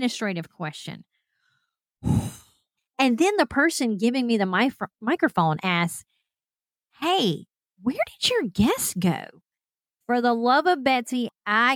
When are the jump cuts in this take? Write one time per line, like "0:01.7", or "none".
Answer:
0:02.8
0:10.0